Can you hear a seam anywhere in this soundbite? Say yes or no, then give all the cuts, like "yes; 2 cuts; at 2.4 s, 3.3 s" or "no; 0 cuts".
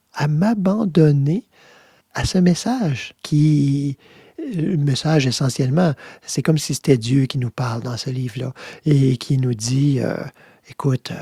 yes; 2 cuts; at 2.0 s, 3.2 s